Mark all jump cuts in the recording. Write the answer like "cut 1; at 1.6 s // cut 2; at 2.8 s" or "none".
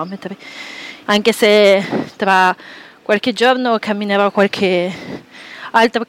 cut 1; at 1.1 s